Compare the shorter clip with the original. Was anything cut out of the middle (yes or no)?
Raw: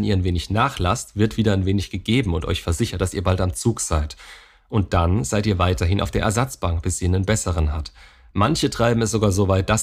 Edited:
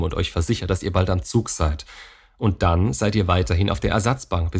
no